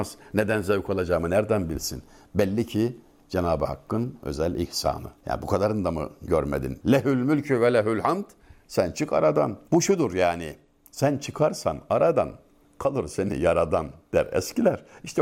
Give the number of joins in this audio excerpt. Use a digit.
1